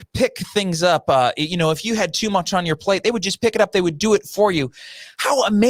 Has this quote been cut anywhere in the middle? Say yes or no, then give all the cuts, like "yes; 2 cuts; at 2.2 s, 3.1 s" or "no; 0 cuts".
no; 0 cuts